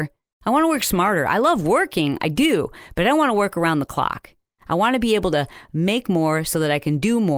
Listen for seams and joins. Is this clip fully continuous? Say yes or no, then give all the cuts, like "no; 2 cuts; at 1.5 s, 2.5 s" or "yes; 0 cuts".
yes; 0 cuts